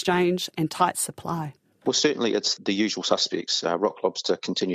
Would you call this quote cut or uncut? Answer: uncut